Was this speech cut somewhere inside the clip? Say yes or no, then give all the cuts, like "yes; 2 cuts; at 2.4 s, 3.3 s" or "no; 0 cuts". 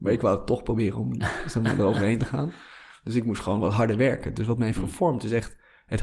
no; 0 cuts